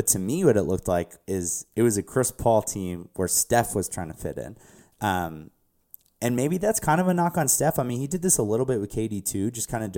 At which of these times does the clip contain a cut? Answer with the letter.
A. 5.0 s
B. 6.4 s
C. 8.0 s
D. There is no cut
D